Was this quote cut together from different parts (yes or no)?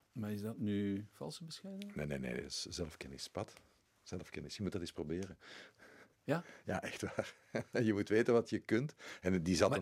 yes